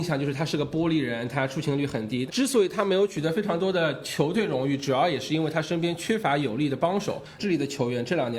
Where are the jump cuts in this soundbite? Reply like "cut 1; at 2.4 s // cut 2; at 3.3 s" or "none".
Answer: cut 1; at 2.3 s // cut 2; at 7.4 s